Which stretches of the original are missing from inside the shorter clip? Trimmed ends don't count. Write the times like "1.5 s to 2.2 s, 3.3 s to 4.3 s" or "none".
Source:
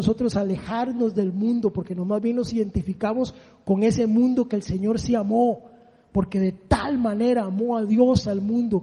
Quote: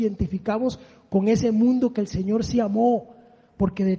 none